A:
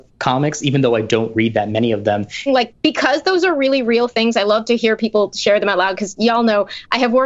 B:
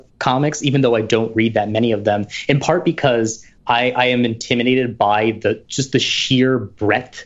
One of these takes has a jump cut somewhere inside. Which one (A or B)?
A